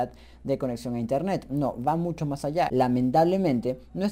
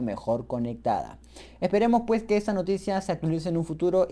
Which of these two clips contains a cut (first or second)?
first